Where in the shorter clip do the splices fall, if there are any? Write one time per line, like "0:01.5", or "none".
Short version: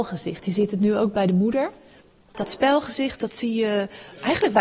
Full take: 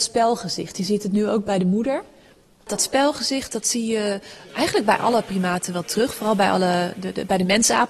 none